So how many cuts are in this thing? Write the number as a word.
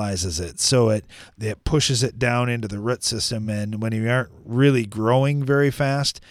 zero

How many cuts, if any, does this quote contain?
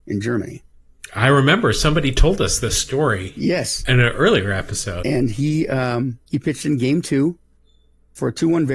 two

